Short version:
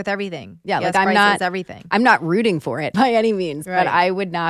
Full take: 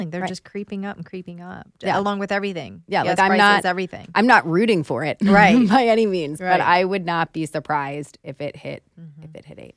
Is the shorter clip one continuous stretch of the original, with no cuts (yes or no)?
no